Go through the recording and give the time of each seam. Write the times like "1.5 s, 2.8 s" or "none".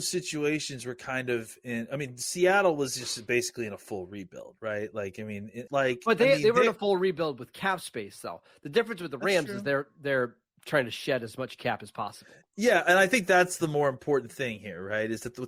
5.7 s